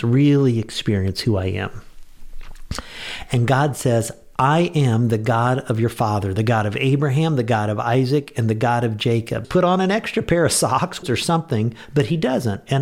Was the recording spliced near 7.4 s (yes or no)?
no